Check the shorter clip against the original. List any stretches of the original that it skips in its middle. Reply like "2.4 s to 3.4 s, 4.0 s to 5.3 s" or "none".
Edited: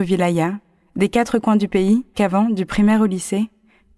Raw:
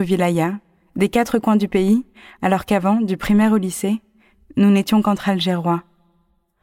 2.1 s to 2.6 s